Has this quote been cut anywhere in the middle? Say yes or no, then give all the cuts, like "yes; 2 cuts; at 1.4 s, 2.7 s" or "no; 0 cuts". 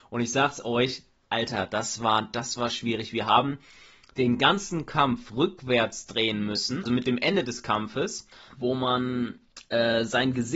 yes; 1 cut; at 6.9 s